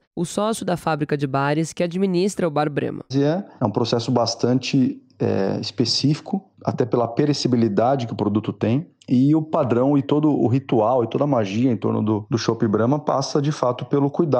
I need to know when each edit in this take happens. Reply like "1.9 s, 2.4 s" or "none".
3.1 s